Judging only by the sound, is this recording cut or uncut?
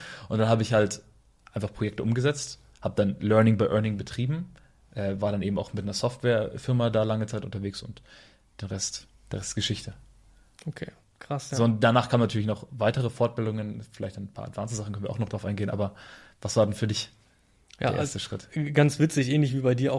uncut